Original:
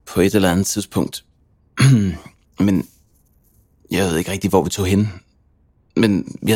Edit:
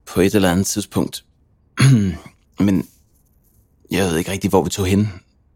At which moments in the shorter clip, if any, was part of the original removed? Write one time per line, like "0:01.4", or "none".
none

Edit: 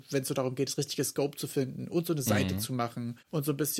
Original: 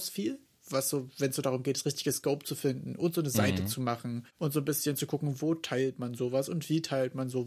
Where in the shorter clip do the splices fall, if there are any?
none

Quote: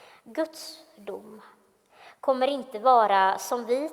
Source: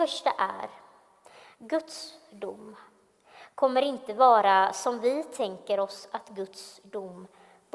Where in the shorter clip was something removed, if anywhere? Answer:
none

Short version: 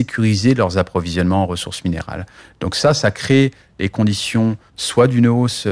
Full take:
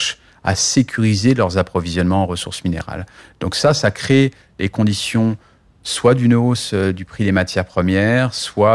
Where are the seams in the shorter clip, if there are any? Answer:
0:04.7

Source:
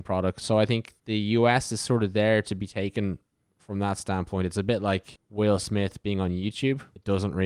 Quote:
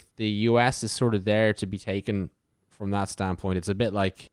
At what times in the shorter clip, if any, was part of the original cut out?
none

